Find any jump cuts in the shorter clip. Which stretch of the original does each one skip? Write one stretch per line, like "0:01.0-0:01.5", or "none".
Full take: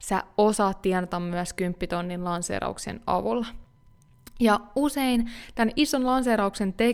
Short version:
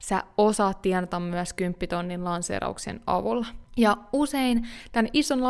0:03.7-0:04.3